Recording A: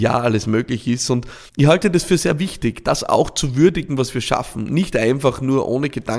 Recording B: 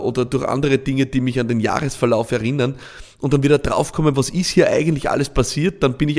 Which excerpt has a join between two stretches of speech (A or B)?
A